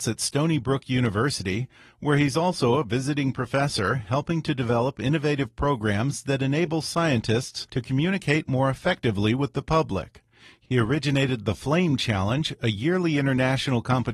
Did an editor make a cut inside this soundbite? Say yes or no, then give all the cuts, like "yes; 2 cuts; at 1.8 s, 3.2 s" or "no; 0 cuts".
no; 0 cuts